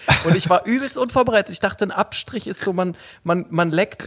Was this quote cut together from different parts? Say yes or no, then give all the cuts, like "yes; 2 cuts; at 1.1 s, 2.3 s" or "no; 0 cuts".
no; 0 cuts